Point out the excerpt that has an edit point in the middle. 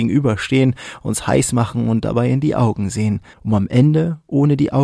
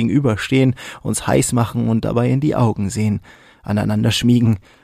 first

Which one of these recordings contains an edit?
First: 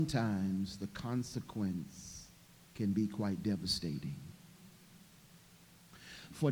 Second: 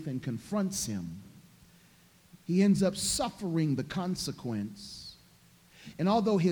second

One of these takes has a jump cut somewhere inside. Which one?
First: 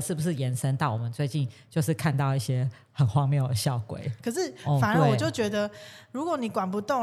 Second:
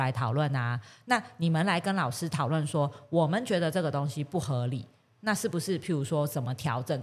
first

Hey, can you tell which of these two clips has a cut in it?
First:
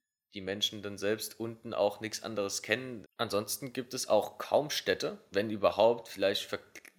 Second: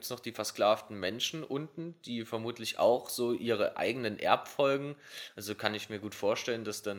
first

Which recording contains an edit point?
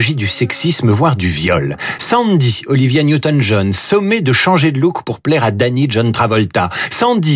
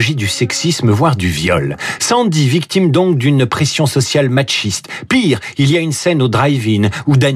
second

